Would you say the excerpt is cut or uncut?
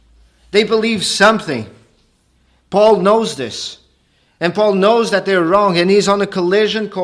uncut